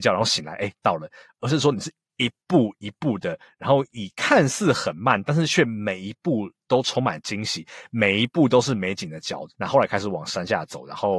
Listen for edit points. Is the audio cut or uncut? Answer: cut